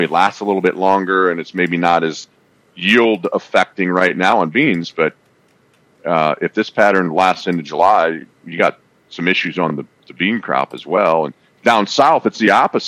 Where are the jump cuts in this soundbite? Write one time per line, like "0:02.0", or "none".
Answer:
none

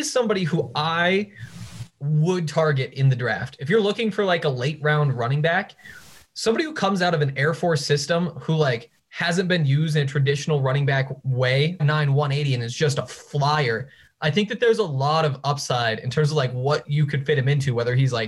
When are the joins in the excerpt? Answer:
0:11.8

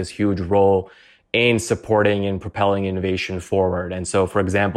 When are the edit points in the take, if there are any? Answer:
none

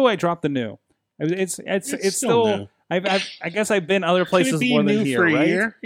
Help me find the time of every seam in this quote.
none

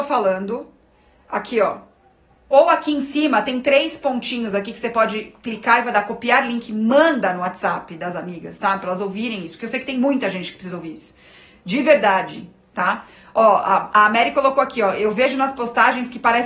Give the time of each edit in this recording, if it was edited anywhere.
0:02.5

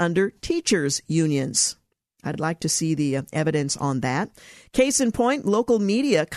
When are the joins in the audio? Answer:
none

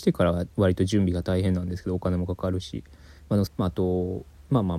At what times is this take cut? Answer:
0:03.5

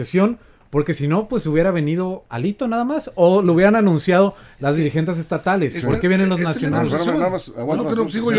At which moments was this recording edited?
none

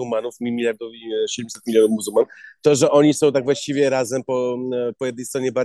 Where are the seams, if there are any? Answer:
none

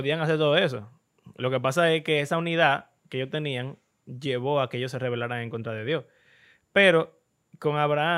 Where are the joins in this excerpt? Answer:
none

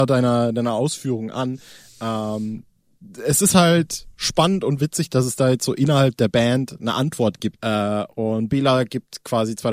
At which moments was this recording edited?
0:07.6

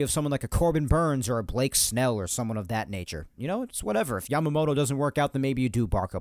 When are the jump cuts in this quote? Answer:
0:03.4

